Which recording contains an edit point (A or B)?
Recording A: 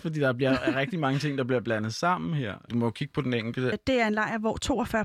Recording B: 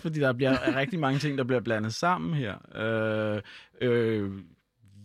A